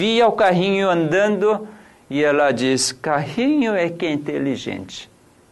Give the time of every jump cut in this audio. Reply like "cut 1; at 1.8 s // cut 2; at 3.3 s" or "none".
none